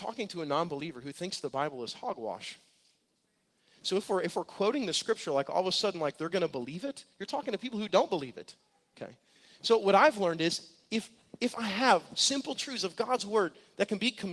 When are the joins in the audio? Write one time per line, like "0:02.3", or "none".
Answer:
none